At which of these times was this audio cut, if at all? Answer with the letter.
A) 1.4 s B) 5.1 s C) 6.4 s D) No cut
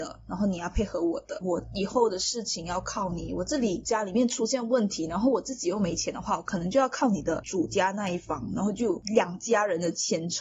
A